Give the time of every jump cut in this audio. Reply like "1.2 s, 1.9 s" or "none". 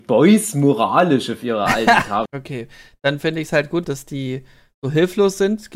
2.3 s, 3.8 s